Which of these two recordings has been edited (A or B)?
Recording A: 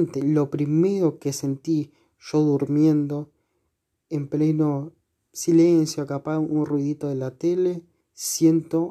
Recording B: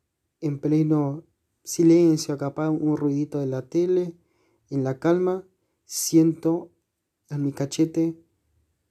A